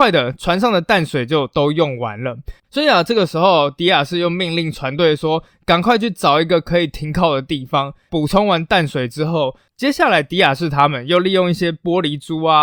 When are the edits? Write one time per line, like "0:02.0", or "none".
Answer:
0:02.6